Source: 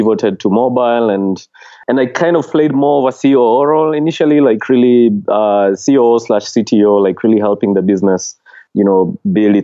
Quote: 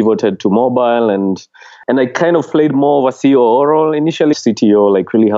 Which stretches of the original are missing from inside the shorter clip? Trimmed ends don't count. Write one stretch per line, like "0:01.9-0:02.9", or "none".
0:04.3-0:06.4